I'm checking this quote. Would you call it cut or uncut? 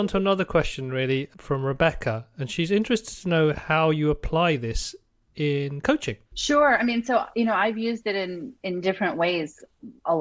cut